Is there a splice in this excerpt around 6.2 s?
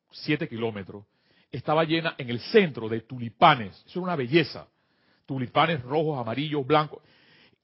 no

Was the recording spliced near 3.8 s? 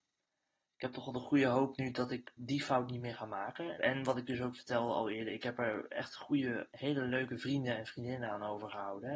yes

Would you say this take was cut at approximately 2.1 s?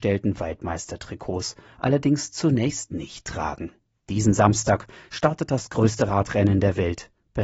no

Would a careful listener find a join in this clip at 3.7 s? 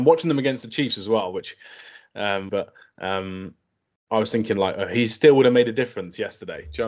no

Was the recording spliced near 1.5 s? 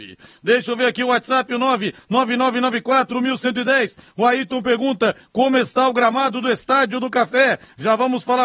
no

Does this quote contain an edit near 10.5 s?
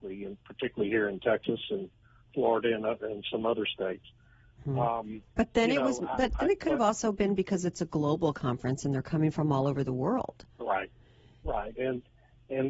no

